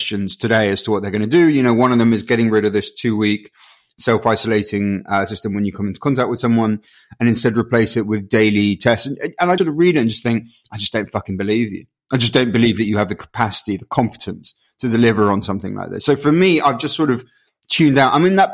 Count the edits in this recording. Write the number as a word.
one